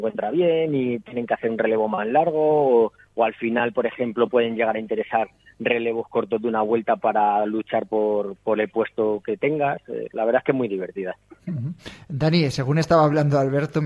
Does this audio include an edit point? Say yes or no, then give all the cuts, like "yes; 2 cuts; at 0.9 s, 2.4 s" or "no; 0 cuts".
no; 0 cuts